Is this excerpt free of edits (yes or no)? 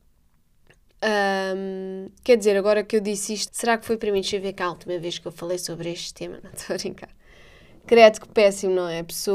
no